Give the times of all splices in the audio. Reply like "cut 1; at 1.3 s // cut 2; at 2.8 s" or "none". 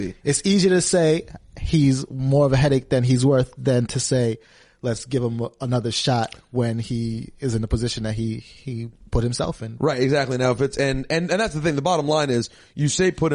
none